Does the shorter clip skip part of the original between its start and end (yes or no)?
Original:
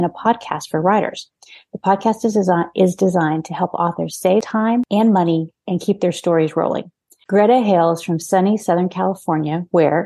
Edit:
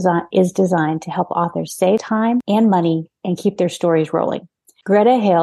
no